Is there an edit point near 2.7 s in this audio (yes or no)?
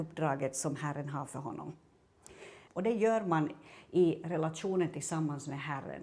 yes